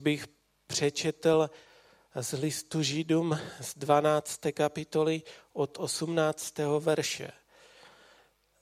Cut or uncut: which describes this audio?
uncut